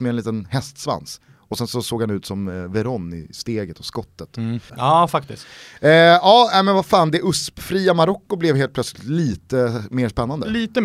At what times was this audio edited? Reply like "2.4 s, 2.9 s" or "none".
4.7 s